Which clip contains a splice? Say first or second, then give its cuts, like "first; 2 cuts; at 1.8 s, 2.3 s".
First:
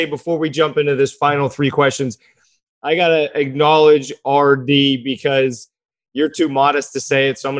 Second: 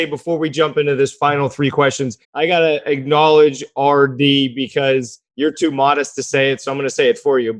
second; 2 cuts; at 2.2 s, 5.3 s